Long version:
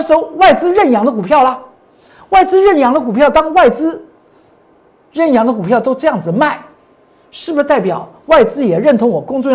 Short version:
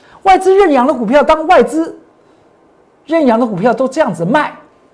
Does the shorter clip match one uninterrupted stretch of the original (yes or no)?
yes